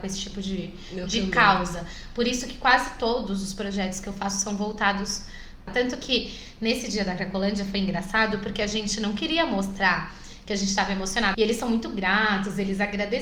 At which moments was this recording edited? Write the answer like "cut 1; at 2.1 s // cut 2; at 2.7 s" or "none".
cut 1; at 5.7 s // cut 2; at 11.3 s